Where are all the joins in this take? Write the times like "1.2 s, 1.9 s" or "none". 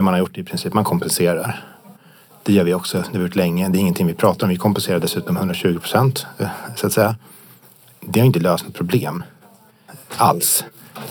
none